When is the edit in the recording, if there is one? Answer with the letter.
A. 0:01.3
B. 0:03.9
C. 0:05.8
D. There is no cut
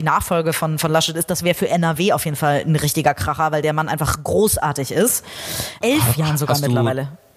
C